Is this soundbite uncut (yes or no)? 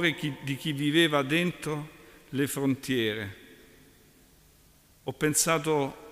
yes